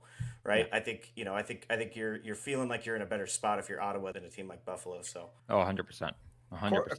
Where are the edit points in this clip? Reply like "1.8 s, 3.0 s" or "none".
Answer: 4.1 s, 5.4 s